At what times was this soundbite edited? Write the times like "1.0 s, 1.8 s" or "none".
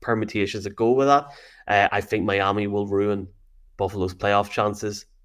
1.9 s

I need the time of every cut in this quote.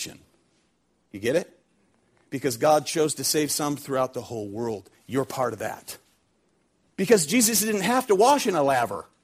6.9 s

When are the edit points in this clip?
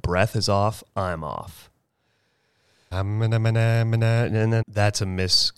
2.9 s, 4.6 s

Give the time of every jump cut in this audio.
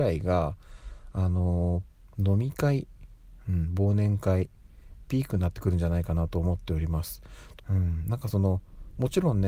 7.6 s

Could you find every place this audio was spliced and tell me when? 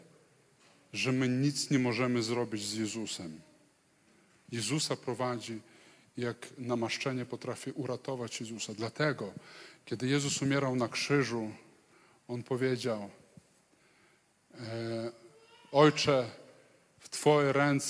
4.5 s

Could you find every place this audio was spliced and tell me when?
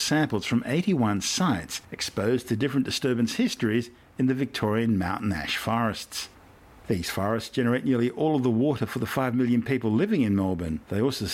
none

